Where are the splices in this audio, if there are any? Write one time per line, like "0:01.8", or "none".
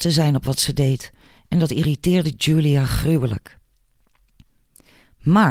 none